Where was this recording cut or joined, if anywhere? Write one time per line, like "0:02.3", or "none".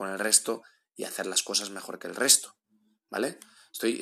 none